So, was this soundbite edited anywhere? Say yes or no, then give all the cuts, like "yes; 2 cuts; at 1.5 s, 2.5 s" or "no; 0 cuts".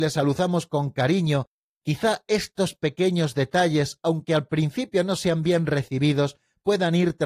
no; 0 cuts